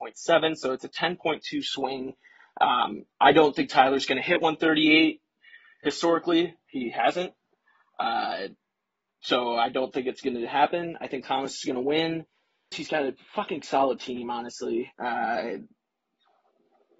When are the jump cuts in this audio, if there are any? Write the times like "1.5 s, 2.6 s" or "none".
12.7 s, 14.9 s